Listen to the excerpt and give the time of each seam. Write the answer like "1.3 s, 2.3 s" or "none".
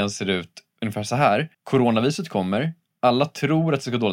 1.5 s